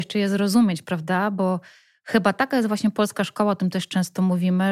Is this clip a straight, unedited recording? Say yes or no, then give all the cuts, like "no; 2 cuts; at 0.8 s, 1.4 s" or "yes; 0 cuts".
yes; 0 cuts